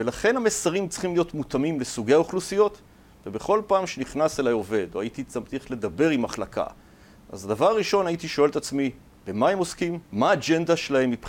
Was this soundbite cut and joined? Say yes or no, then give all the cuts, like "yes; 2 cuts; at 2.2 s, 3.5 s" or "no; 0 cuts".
yes; 1 cut; at 10.0 s